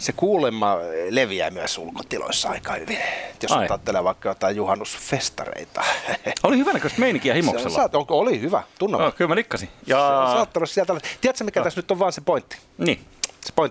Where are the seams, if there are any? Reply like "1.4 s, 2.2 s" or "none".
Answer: none